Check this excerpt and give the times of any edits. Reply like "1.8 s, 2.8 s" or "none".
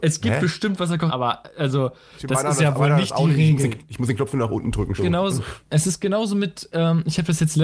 1.1 s, 5.0 s